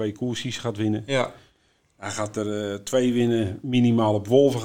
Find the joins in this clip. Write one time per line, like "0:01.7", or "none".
none